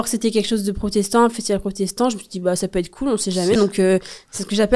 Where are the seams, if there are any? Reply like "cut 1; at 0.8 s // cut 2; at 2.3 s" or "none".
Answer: cut 1; at 3.6 s